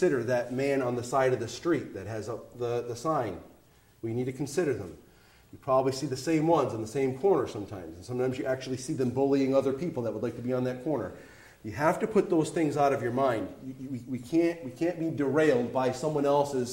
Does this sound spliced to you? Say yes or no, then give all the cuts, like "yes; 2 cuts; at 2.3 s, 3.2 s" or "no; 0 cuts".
yes; 1 cut; at 2.5 s